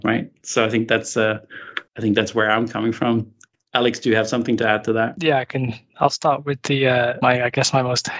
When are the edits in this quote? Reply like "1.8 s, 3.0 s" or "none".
1.9 s, 3.5 s

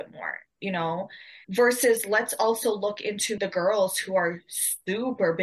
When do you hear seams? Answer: 1.4 s, 3.4 s

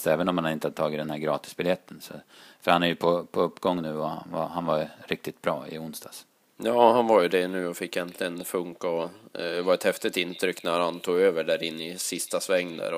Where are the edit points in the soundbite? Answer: none

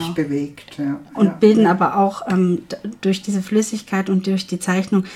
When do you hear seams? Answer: 1.1 s

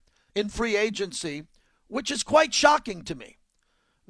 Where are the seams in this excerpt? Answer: none

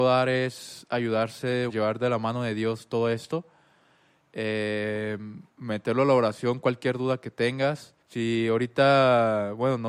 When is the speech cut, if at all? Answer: 1.7 s, 5.5 s, 8.0 s

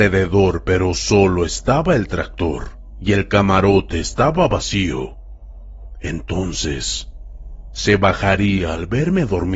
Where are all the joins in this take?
none

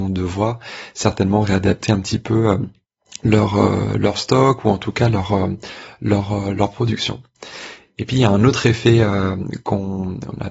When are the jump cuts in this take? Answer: none

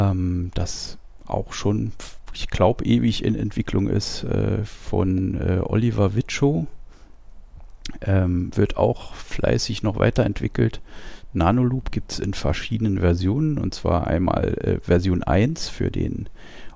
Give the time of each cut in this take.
none

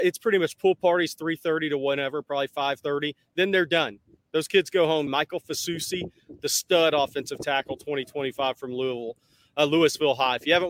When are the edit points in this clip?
5.1 s

